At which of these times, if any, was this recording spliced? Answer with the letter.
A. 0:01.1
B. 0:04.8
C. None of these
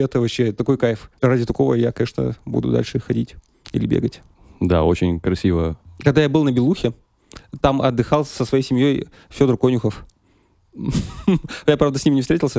A